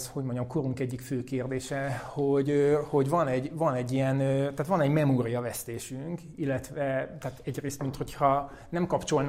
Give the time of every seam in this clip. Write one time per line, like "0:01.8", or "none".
none

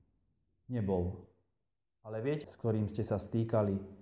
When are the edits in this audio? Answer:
0:02.4

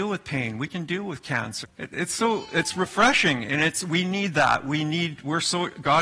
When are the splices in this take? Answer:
0:01.6

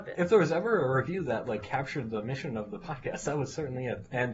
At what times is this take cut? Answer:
none

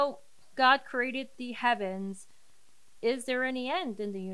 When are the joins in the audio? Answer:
none

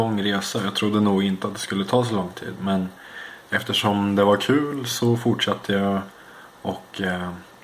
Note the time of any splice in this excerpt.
none

